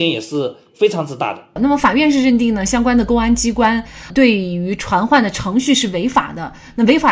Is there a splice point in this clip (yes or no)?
yes